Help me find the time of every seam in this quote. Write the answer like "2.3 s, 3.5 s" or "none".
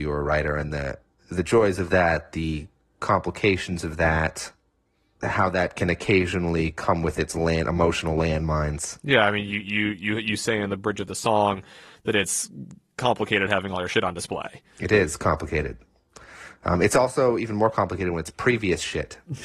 none